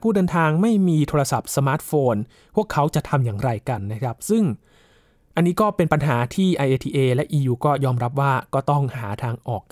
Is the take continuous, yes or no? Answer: yes